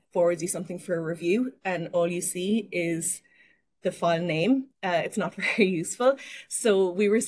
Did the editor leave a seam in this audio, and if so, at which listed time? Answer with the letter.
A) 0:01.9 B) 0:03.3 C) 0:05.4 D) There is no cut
D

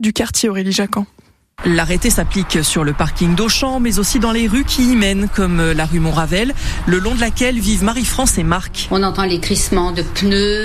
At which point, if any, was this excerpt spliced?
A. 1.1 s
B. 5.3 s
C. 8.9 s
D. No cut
D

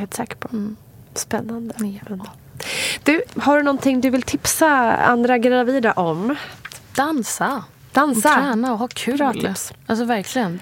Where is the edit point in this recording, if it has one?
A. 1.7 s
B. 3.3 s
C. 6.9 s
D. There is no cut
B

